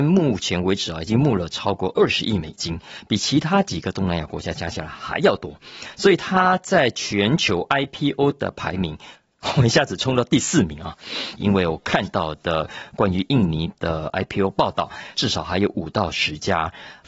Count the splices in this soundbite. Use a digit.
2